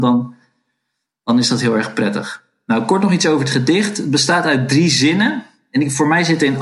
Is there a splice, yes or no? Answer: no